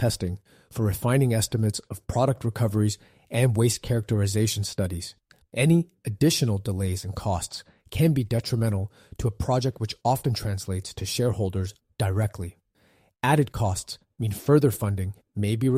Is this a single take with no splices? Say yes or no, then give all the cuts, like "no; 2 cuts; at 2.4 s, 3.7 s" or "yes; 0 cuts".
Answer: no; 1 cut; at 5.4 s